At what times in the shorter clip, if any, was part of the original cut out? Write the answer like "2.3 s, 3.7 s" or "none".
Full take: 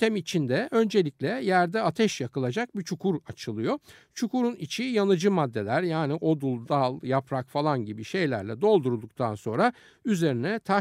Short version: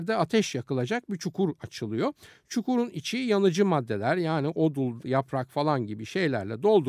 5.0 s

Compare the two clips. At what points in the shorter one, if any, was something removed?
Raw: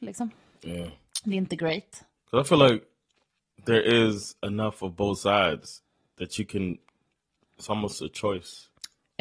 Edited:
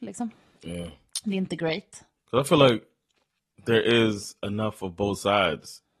none

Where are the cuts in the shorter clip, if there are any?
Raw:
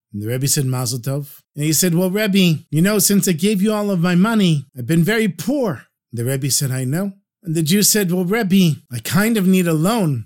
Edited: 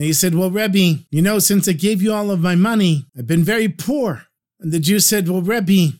4.4 s

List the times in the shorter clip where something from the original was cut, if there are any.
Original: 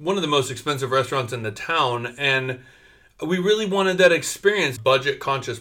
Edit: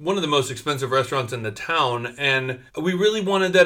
2.7 s

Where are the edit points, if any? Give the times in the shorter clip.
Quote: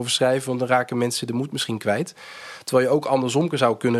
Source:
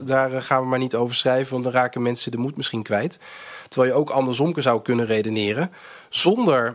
none

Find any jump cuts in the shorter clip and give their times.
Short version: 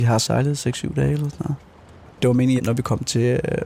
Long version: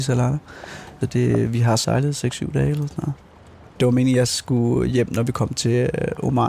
2.6 s

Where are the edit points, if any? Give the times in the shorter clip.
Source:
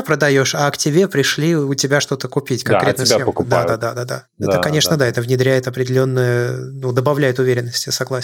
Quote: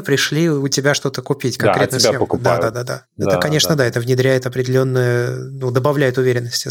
2.7 s

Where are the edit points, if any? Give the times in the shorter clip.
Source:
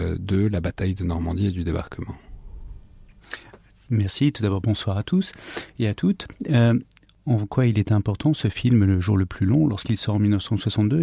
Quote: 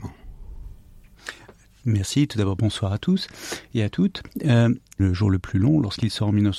5.0 s

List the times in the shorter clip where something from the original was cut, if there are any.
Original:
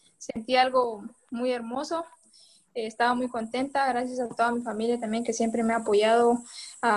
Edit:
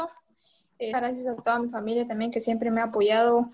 0.9 s

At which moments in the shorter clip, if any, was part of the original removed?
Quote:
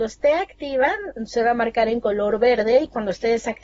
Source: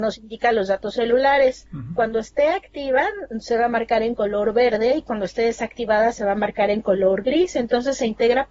none

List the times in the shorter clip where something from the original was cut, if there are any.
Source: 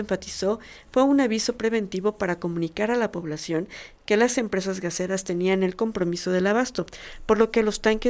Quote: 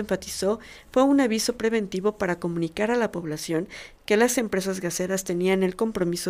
none

